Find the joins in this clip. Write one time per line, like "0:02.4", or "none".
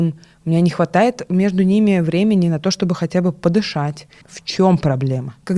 0:04.2